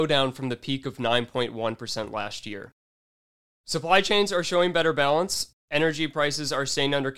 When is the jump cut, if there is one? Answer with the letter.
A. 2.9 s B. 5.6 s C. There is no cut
C